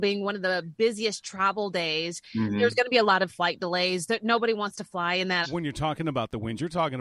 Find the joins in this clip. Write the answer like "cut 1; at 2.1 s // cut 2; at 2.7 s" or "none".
cut 1; at 5.4 s